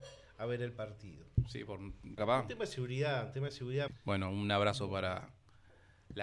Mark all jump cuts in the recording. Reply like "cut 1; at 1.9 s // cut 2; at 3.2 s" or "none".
cut 1; at 2.2 s // cut 2; at 3.9 s